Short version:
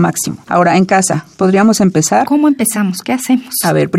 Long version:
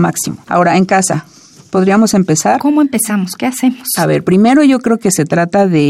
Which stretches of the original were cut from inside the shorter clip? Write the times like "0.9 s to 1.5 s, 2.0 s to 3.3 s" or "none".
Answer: 1.3 s to 1.7 s